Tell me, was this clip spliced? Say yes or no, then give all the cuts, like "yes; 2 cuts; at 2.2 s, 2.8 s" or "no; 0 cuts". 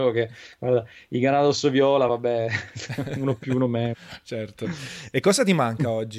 no; 0 cuts